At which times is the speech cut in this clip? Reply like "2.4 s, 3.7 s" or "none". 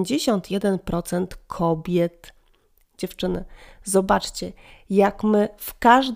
2.8 s